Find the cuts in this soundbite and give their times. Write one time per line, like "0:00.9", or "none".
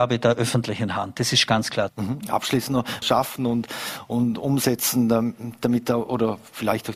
0:01.9
0:03.0